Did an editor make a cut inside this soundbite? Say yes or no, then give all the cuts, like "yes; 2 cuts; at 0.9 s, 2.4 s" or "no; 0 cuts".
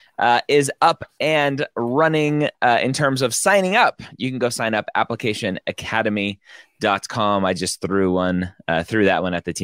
no; 0 cuts